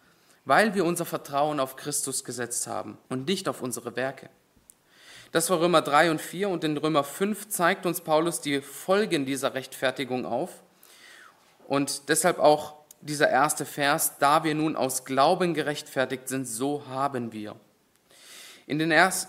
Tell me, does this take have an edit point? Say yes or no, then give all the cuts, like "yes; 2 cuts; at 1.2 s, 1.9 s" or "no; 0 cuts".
yes; 1 cut; at 3.0 s